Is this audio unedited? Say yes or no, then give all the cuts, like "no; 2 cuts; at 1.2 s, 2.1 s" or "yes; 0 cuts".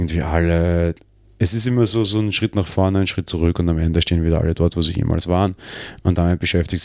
yes; 0 cuts